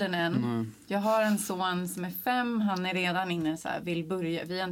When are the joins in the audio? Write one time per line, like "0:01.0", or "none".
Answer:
none